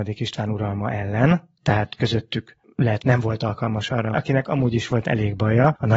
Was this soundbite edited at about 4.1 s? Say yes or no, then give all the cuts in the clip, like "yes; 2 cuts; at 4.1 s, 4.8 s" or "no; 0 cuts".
yes; 2 cuts; at 3.0 s, 4.1 s